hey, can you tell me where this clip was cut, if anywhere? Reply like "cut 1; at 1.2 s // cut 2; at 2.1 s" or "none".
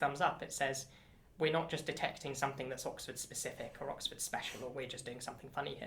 none